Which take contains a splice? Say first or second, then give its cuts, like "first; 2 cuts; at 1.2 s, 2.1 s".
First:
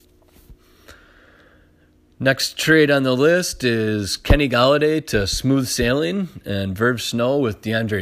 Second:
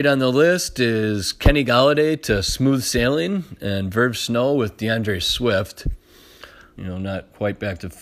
second; 1 cut; at 6.8 s